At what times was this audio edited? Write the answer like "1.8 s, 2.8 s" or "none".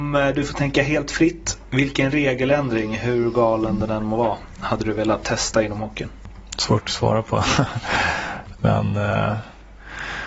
none